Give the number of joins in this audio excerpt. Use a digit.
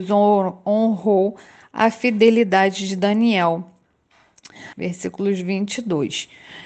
1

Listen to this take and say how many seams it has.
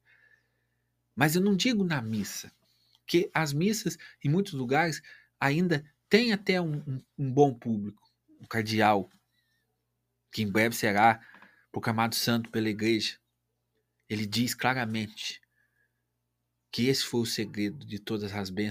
1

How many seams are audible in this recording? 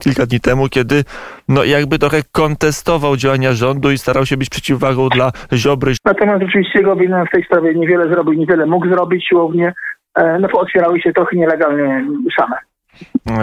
1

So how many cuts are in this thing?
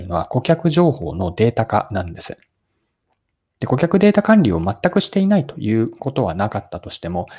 0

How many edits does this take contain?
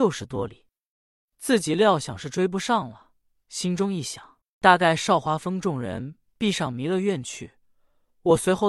0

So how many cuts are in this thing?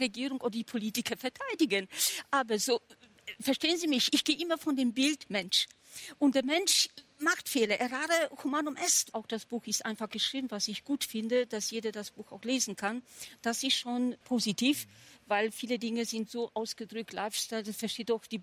2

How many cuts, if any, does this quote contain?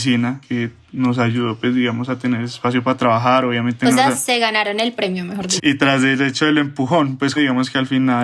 2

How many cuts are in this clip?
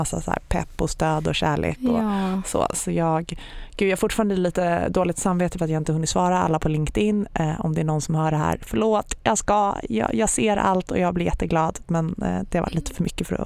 0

